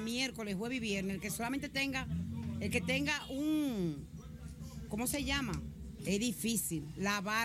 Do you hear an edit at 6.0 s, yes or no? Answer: yes